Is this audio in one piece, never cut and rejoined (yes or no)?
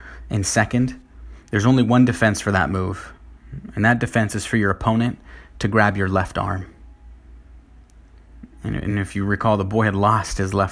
yes